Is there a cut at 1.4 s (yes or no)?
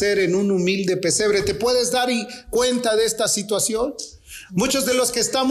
no